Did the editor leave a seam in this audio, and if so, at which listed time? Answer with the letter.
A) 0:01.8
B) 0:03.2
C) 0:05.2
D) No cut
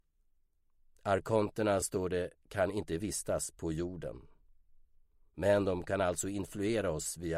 D